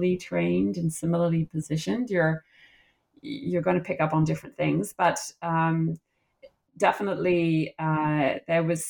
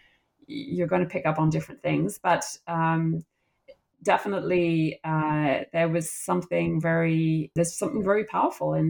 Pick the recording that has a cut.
second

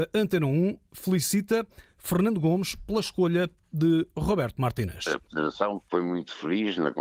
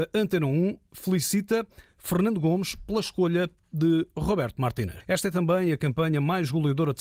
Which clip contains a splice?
second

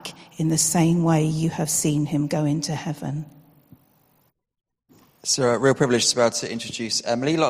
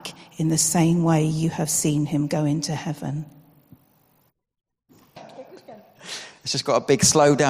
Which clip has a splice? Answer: second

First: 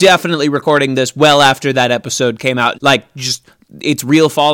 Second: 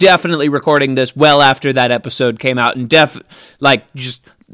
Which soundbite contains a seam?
first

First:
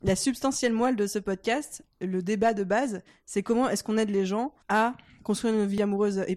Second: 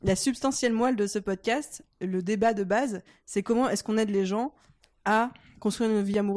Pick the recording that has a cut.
first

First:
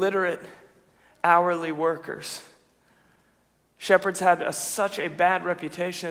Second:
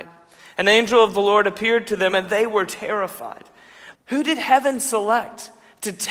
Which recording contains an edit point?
second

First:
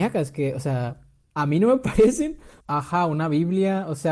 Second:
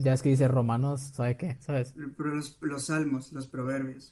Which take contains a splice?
first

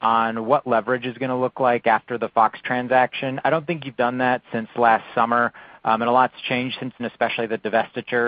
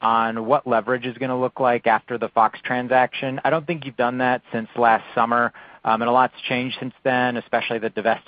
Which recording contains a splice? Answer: first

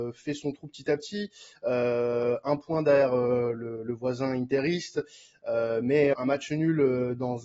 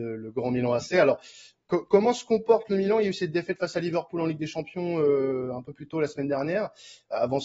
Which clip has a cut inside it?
first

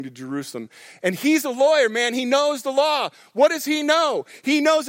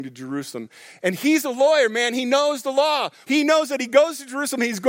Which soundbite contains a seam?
second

